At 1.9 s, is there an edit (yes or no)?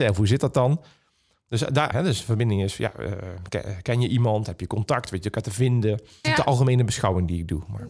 yes